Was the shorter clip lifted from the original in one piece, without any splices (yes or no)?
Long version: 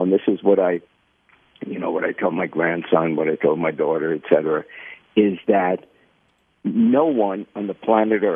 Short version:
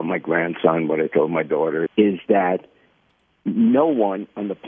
no